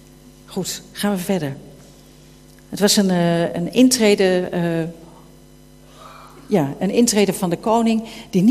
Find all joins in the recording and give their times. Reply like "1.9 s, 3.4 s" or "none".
none